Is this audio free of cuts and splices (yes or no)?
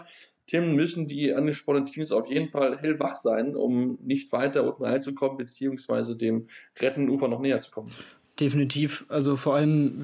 yes